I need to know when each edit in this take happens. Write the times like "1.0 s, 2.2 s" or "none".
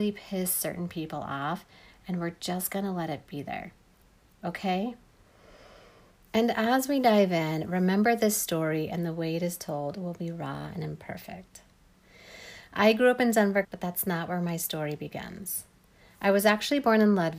6.3 s, 13.6 s